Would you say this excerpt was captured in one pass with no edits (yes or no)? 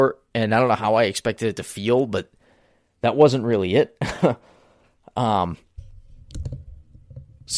yes